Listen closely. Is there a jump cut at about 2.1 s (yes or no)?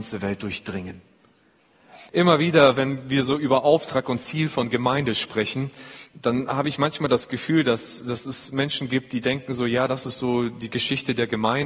yes